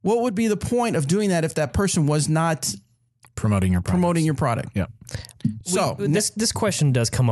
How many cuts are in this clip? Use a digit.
0